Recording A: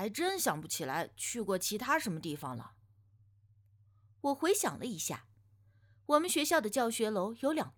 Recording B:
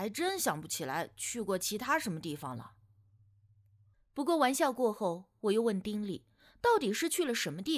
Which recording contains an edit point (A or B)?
B